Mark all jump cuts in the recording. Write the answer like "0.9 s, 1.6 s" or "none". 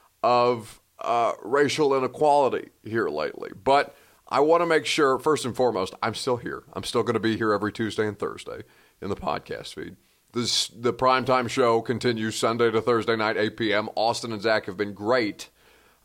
none